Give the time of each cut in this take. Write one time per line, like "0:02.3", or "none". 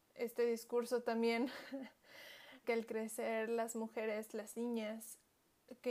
0:02.6